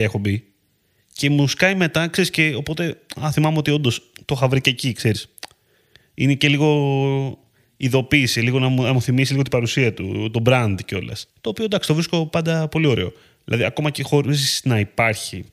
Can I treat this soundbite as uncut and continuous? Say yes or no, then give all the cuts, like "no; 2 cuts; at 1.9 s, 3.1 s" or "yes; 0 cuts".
no; 1 cut; at 11.3 s